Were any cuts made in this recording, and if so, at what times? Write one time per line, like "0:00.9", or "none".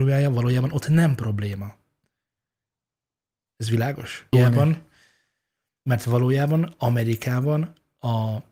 0:04.3